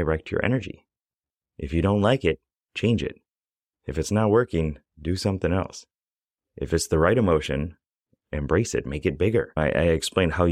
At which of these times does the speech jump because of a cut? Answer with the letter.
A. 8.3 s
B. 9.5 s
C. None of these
A